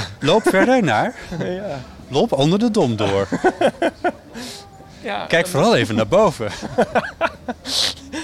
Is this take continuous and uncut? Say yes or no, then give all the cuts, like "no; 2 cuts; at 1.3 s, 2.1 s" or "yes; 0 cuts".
yes; 0 cuts